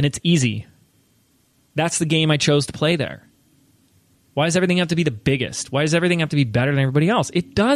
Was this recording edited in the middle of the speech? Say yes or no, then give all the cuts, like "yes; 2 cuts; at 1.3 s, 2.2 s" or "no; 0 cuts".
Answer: no; 0 cuts